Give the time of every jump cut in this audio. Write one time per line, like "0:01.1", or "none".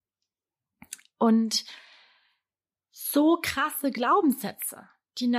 none